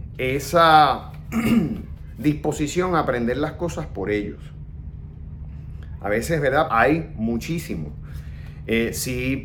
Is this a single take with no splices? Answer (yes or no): no